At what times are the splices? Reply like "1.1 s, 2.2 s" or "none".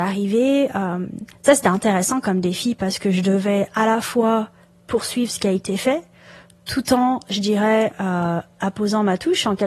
none